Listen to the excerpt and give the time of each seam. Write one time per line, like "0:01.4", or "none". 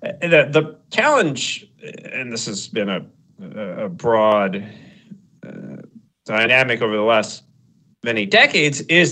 none